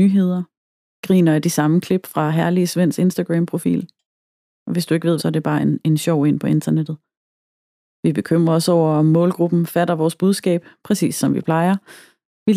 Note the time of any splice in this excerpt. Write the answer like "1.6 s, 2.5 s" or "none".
5.2 s, 8.0 s